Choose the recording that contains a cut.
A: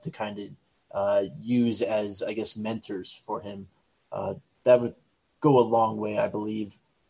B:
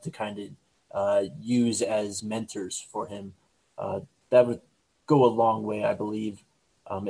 B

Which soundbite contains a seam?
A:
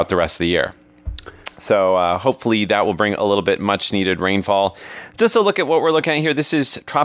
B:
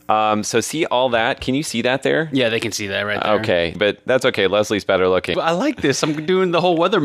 B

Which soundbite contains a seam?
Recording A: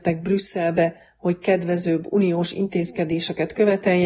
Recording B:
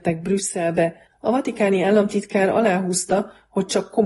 B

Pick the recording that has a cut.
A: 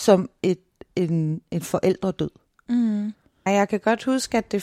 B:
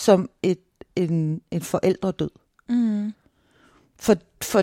A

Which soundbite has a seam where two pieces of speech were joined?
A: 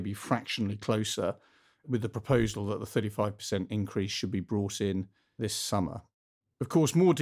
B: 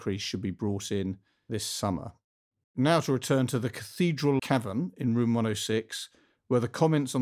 B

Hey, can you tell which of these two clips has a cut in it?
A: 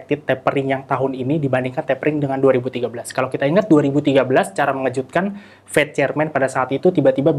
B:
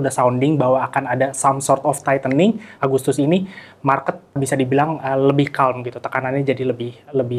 B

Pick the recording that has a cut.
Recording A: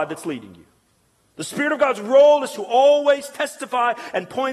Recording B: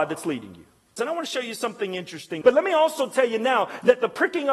B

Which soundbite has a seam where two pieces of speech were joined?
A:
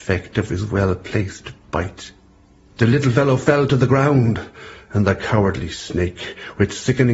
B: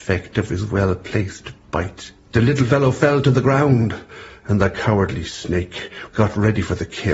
B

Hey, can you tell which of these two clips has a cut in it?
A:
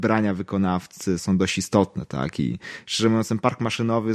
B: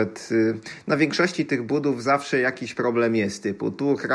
A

